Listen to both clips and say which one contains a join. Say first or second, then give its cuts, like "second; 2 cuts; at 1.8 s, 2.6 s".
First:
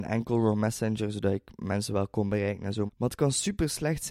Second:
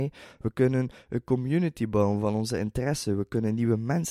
first; 1 cut; at 2.9 s